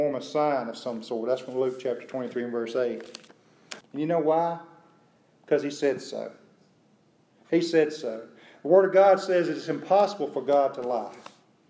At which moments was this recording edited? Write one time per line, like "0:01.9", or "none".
0:03.8